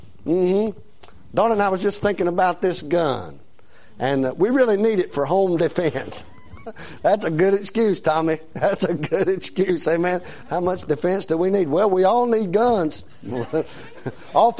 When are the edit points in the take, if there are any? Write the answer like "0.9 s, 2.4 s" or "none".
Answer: 10.4 s